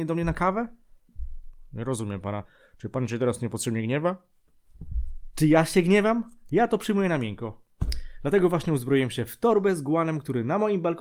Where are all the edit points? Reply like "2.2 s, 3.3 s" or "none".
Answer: 6.5 s